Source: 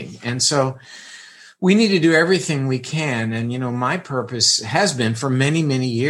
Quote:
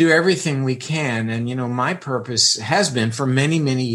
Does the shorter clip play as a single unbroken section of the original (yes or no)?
yes